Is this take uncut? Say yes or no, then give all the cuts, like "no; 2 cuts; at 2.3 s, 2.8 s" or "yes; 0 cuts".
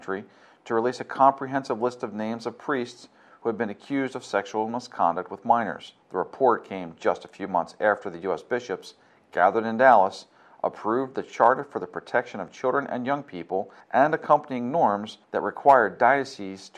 yes; 0 cuts